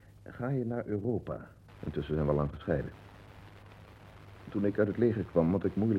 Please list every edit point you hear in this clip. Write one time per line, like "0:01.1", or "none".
0:01.7

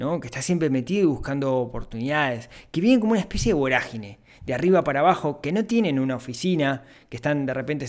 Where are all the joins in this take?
none

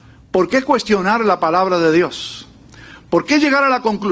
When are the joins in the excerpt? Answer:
none

